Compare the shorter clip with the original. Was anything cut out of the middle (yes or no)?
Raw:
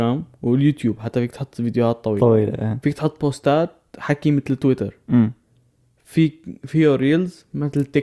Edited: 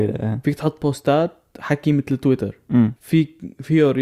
yes